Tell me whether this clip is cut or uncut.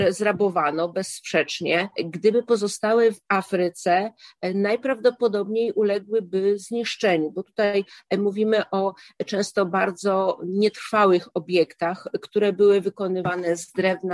cut